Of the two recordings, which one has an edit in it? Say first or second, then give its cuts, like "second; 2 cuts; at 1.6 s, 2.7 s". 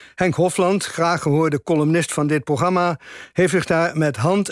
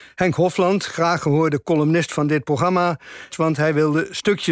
second; 1 cut; at 3.3 s